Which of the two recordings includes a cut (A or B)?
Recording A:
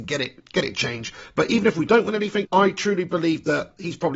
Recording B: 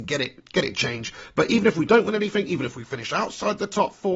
A